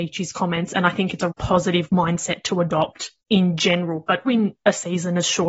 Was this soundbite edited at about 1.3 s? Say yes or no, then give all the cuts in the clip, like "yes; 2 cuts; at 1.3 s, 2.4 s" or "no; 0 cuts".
yes; 3 cuts; at 1.3 s, 3.2 s, 4.3 s